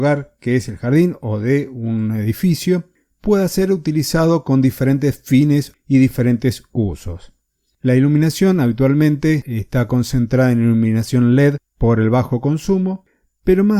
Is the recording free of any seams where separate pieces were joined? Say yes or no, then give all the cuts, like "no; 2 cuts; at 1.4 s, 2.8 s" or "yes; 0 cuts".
yes; 0 cuts